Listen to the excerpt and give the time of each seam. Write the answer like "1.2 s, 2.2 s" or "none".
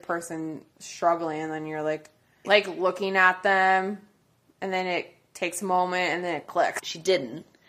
2.4 s, 6.8 s